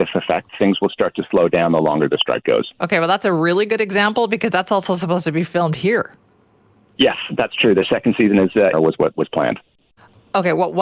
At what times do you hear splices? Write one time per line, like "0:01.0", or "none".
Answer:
0:08.7